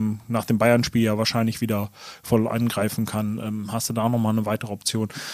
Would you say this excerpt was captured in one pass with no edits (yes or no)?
yes